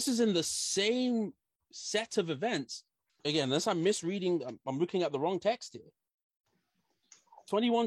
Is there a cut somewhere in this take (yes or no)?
yes